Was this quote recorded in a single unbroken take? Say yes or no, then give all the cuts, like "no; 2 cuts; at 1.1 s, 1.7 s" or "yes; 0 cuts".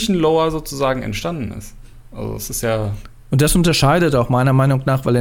yes; 0 cuts